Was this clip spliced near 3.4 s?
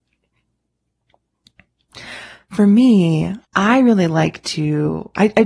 yes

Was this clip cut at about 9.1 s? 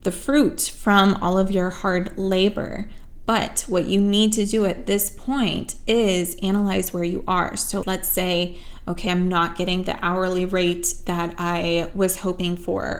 yes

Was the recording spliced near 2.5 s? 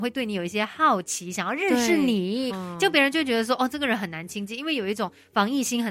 yes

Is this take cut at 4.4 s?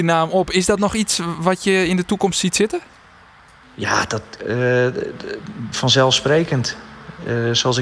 yes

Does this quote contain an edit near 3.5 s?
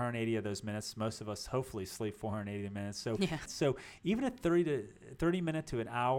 yes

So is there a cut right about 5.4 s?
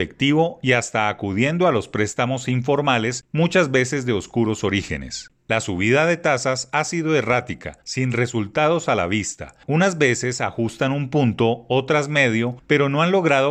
yes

